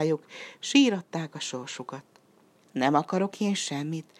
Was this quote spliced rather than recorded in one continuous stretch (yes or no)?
yes